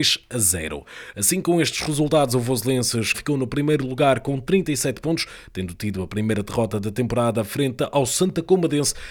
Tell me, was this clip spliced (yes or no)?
yes